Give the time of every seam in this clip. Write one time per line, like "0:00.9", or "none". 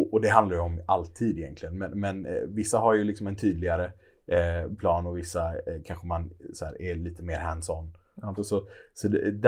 0:08.4

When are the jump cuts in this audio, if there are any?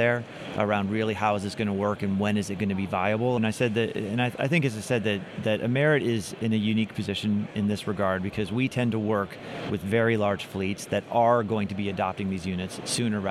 0:03.4

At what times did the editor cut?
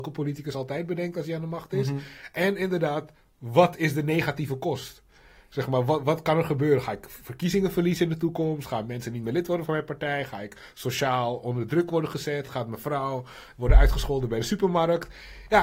none

